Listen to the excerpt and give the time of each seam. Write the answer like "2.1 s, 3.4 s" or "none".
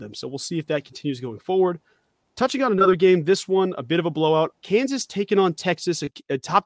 4.5 s